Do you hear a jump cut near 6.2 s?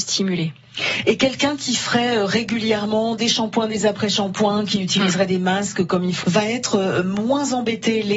yes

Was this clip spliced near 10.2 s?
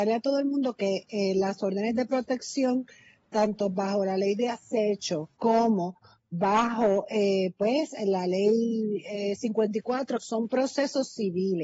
yes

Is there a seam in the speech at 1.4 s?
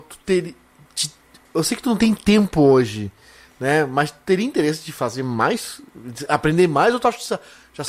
no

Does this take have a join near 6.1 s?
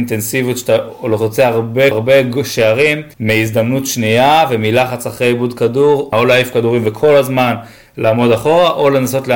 yes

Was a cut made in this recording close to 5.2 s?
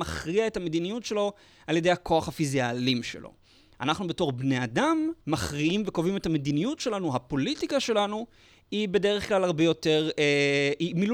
yes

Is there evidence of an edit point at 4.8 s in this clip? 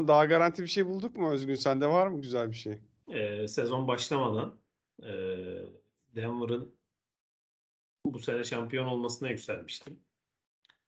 no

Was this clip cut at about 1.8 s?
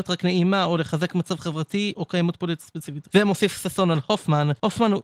no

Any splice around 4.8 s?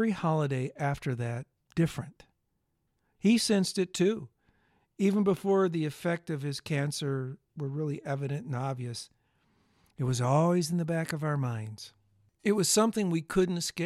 no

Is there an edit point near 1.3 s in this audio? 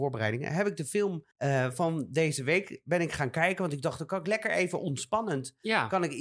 yes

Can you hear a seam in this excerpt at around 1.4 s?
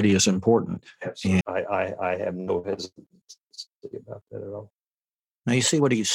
yes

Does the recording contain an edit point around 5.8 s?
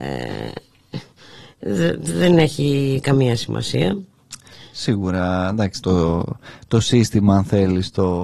yes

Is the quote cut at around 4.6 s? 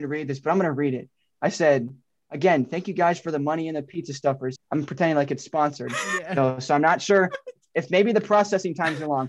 yes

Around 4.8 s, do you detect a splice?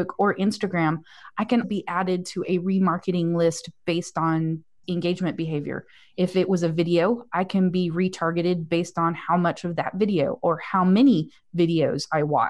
yes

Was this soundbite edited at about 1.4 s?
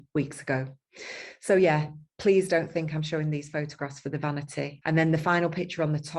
no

